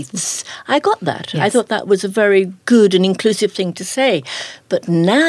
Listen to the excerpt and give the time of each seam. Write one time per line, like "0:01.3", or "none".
none